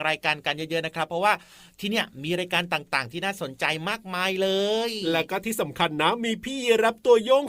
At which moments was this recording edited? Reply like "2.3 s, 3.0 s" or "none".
none